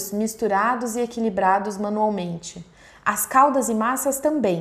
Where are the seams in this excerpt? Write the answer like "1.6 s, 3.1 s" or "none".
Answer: none